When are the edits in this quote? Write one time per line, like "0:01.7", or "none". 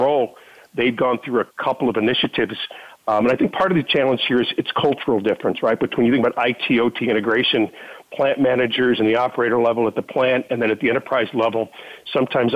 none